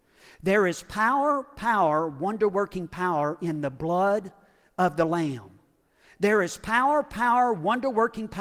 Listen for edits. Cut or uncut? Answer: uncut